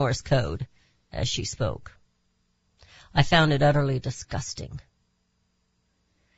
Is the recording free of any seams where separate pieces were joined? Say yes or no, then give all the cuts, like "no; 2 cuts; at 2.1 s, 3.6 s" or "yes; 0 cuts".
yes; 0 cuts